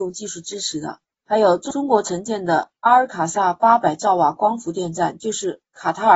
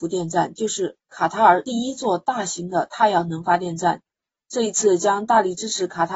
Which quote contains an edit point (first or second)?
first